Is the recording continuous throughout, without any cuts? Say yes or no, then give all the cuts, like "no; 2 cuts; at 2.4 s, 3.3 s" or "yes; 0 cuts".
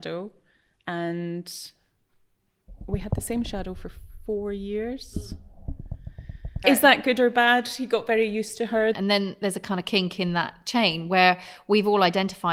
no; 2 cuts; at 6.6 s, 8.9 s